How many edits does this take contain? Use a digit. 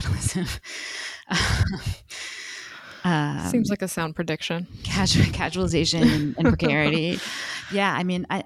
0